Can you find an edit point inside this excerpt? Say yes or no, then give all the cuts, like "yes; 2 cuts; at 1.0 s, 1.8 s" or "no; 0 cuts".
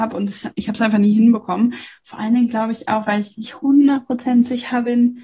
no; 0 cuts